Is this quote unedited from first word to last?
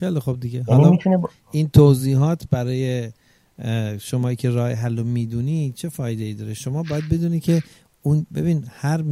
yes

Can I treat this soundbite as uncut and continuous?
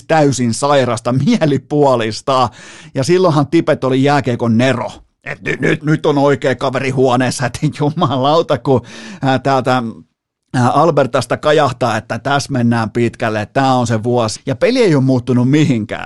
no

